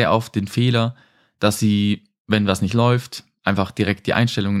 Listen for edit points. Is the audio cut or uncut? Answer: uncut